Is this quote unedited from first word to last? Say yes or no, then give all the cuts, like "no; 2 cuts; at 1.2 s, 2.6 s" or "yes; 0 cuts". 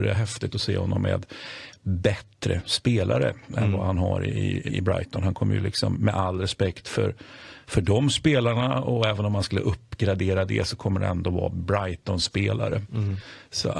no; 2 cuts; at 4.7 s, 5.9 s